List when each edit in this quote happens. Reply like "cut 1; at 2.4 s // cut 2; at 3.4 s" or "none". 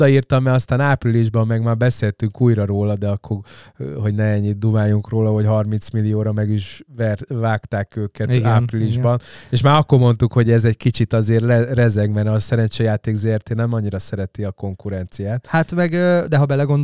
cut 1; at 6.9 s